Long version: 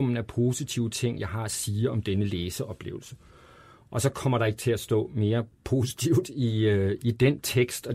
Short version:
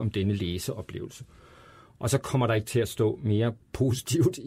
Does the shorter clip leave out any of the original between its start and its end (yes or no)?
no